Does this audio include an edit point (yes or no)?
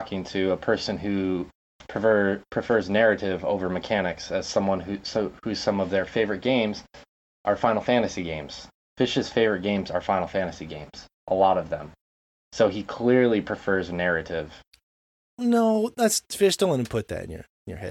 no